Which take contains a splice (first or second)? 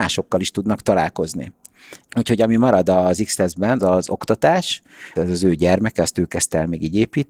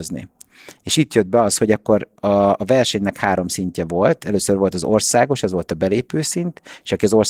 first